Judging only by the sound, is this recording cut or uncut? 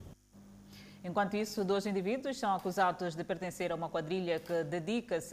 uncut